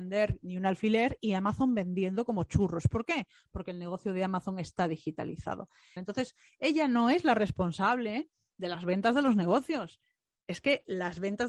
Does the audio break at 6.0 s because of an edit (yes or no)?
yes